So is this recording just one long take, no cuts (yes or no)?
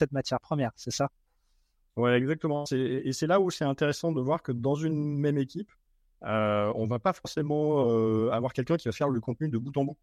yes